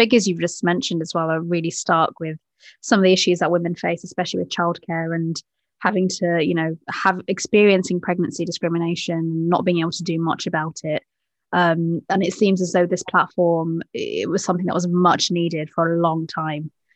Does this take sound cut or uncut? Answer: uncut